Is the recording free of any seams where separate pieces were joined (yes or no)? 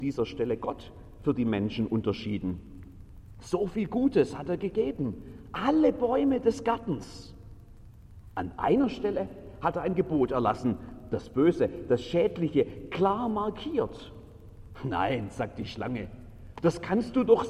no